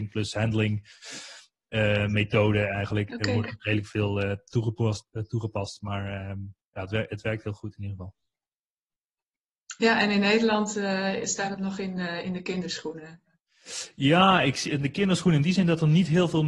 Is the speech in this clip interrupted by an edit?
no; 0 cuts

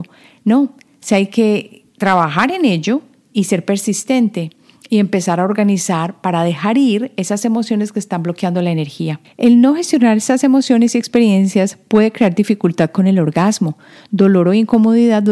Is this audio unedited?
yes; 0 cuts

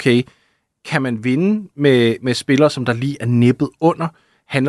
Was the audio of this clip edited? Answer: no; 0 cuts

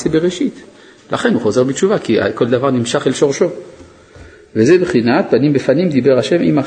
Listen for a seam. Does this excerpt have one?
no; 0 cuts

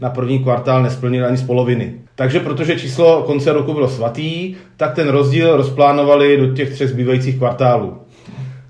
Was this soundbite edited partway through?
yes; 1 cut; at 2.1 s

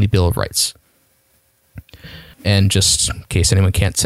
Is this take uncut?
no; 1 cut; at 2.3 s

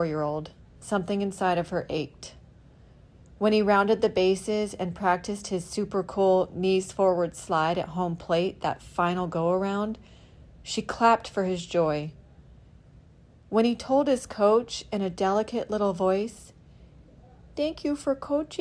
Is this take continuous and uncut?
yes; 0 cuts

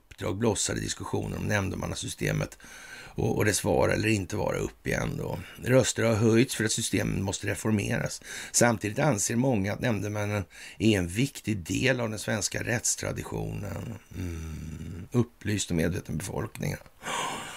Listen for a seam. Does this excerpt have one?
no; 0 cuts

